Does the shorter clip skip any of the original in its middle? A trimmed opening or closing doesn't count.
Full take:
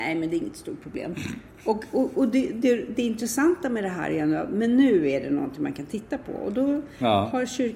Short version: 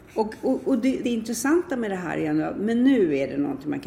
yes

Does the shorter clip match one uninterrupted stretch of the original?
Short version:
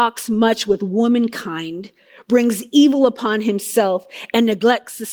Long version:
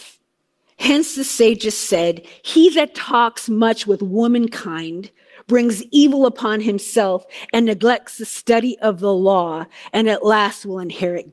yes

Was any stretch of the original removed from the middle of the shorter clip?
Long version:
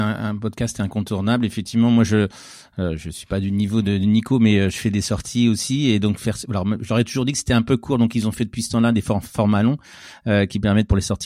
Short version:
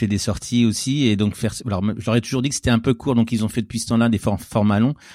no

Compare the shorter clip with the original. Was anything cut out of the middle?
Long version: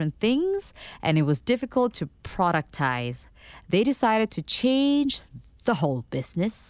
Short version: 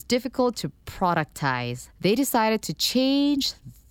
yes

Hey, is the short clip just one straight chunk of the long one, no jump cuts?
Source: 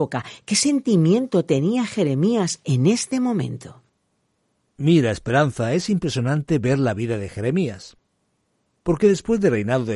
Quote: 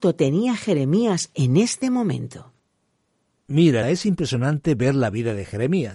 no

